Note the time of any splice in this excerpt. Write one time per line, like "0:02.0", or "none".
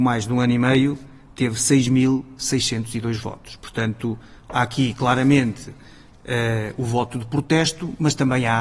none

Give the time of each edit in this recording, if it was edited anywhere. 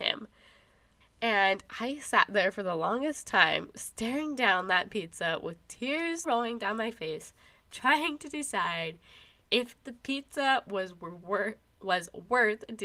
0:01.0
0:06.2

